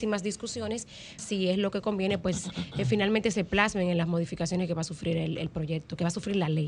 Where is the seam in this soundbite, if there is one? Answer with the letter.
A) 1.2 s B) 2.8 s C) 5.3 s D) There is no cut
A